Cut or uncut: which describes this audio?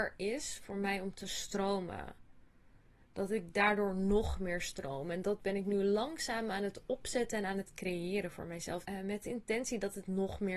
cut